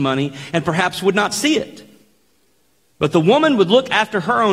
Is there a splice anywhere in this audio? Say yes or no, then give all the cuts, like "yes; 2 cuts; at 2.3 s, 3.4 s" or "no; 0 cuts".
no; 0 cuts